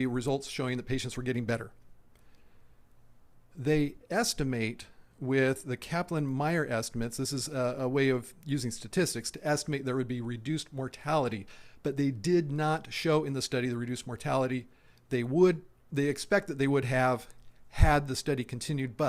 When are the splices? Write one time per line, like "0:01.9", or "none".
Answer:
none